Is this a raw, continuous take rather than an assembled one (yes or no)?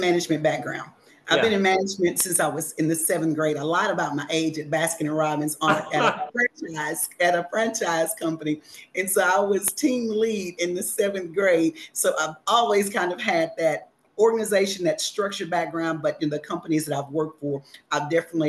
yes